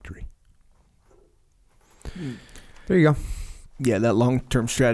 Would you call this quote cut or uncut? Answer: uncut